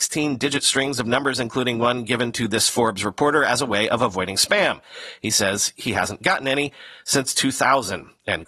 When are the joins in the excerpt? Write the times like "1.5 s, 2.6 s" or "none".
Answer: none